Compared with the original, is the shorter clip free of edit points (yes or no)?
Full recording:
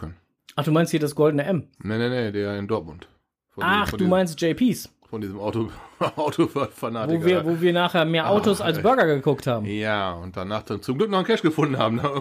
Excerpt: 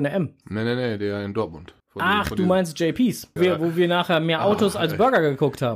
no